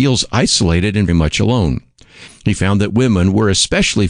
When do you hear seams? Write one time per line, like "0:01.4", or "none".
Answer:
0:01.1